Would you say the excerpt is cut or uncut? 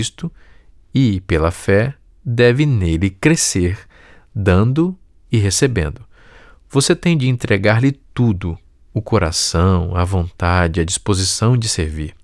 uncut